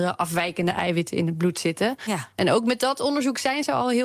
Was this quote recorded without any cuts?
yes; 0 cuts

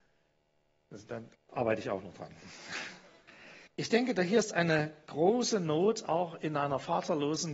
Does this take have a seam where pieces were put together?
yes; 2 cuts; at 1.3 s, 3.7 s

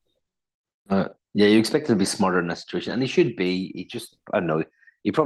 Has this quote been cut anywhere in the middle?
no; 0 cuts

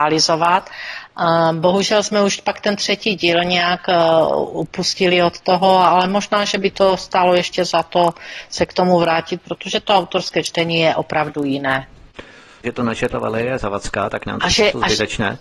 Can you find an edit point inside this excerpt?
yes; 1 cut; at 12.6 s

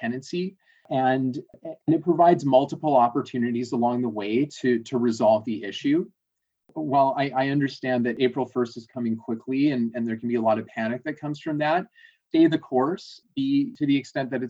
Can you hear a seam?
no; 0 cuts

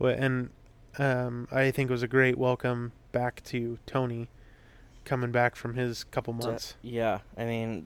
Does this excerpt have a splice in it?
no; 0 cuts

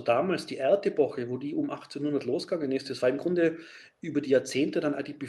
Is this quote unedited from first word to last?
yes; 0 cuts

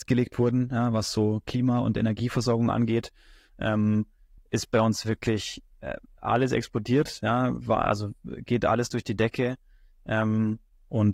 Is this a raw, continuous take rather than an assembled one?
yes; 0 cuts

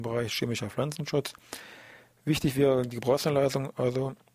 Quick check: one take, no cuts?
yes; 0 cuts

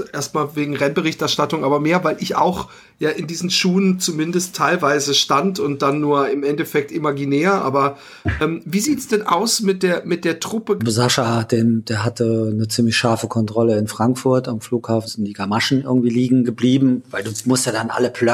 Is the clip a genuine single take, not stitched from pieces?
no; 2 cuts; at 10.8 s, 15.1 s

